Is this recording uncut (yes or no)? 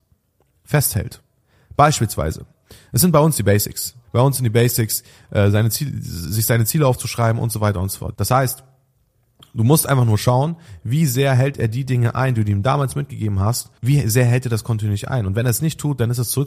no